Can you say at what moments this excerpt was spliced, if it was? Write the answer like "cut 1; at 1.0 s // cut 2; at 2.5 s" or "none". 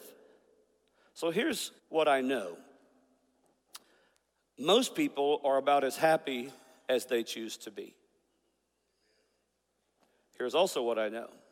cut 1; at 1.8 s